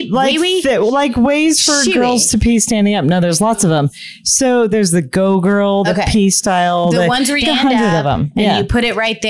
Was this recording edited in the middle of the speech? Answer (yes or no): yes